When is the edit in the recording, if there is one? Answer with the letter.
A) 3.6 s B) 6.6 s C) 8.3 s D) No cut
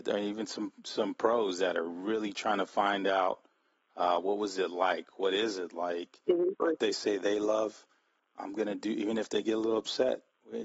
B